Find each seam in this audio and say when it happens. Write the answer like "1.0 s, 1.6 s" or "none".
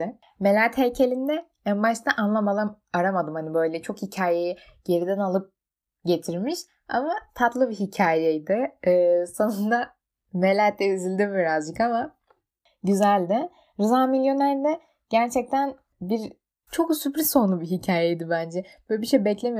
16.7 s